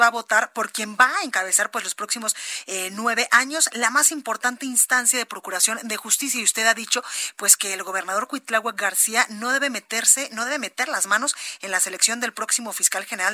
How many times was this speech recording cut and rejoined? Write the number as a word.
zero